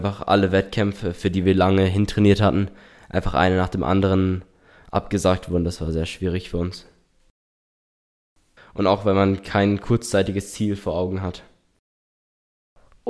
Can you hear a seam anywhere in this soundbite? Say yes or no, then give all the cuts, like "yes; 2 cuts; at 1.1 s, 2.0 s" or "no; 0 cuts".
yes; 1 cut; at 8.6 s